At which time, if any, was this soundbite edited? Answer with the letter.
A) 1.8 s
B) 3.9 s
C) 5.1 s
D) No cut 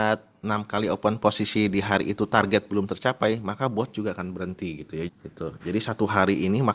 C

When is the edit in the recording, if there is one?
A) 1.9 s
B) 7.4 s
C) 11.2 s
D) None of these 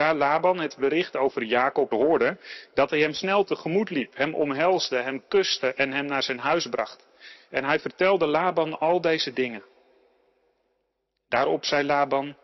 A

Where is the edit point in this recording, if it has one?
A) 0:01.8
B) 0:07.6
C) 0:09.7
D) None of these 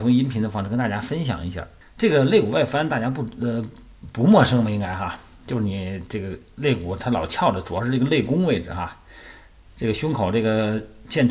A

